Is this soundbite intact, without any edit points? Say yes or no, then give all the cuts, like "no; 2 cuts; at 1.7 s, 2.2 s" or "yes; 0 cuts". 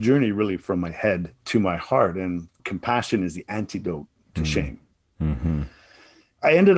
yes; 0 cuts